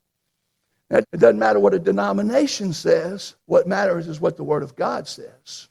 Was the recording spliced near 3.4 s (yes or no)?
yes